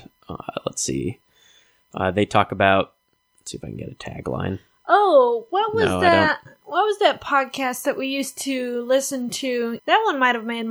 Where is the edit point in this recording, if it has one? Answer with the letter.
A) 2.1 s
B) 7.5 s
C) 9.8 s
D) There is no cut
C